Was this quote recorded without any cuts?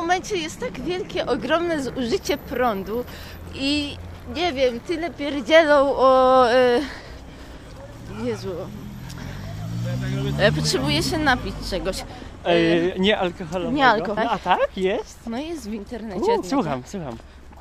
no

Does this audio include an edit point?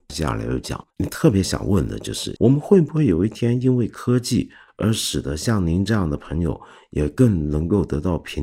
yes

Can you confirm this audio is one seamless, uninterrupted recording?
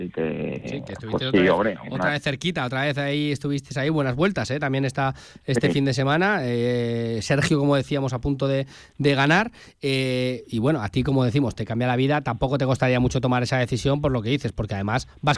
yes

